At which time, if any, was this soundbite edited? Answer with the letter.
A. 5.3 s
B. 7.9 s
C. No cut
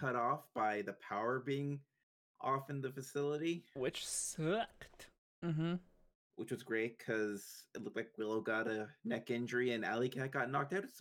A